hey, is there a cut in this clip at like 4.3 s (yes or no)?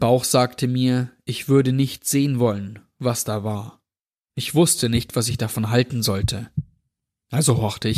yes